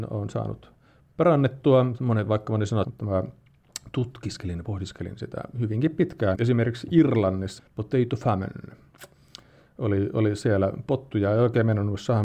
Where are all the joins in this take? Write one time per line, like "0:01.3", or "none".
0:02.8
0:06.3
0:07.6